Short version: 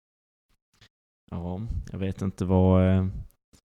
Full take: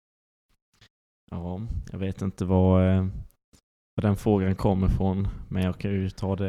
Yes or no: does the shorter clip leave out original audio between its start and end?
no